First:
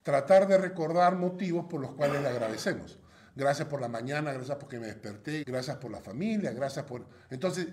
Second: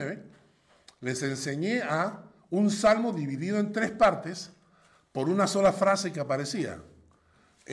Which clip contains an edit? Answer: first; 1 cut; at 5.4 s

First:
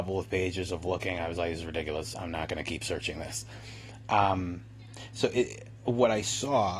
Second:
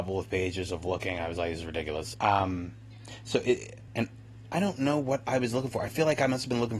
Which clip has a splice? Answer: second; 2 cuts; at 2.1 s, 3.9 s

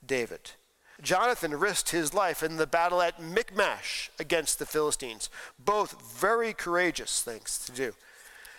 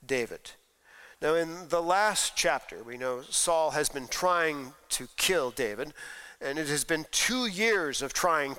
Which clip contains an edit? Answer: first; 1 cut; at 1.0 s

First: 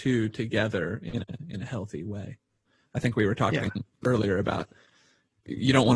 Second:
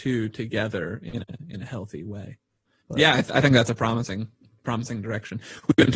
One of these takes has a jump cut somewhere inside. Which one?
second; 1 cut; at 2.8 s

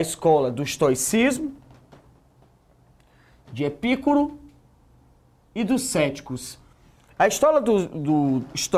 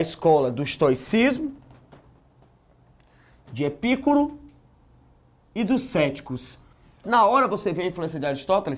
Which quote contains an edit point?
second; 1 cut; at 7.0 s

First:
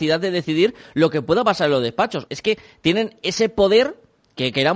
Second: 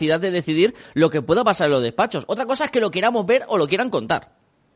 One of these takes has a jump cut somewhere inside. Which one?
first; 1 cut; at 2.3 s

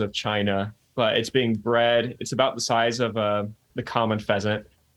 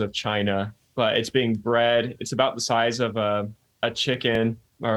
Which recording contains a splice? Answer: first; 1 cut; at 3.7 s

